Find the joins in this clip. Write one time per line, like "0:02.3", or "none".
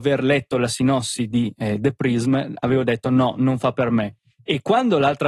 none